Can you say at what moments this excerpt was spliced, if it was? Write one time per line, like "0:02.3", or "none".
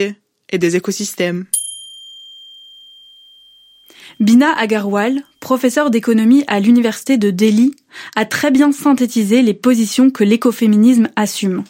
none